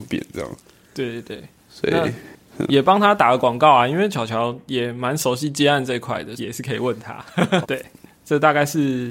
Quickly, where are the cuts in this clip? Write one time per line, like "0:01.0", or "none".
0:06.4
0:07.6